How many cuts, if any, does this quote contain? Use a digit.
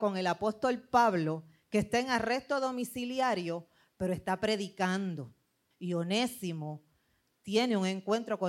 1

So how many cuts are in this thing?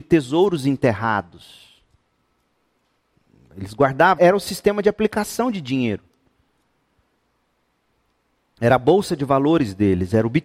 1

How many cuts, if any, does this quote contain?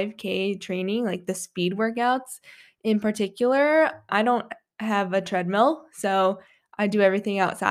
1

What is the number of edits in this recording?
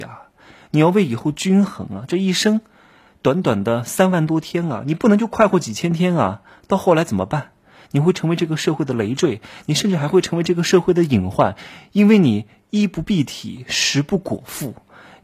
0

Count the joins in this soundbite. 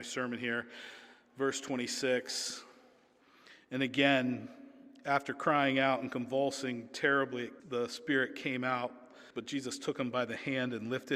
2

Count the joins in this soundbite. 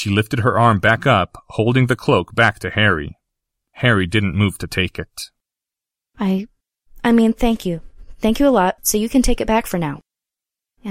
1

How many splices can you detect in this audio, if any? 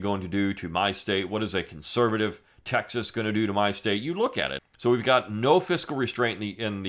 1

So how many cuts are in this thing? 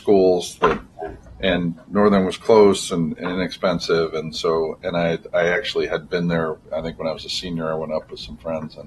0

